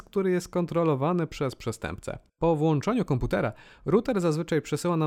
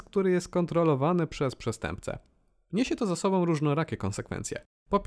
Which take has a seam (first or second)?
first